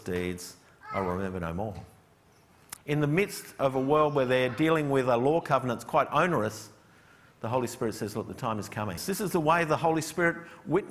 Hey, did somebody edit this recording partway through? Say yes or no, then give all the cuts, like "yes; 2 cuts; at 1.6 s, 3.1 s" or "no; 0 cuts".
yes; 2 cuts; at 2.8 s, 9.0 s